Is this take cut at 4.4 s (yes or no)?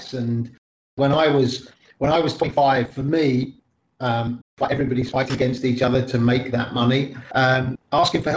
yes